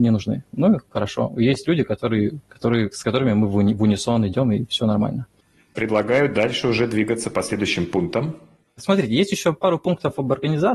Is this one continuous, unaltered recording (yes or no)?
yes